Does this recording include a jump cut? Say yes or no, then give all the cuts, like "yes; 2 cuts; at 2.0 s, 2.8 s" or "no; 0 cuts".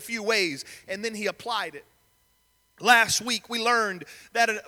no; 0 cuts